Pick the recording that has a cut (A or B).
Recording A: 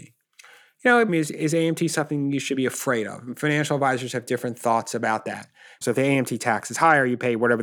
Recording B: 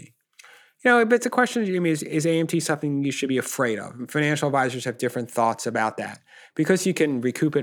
A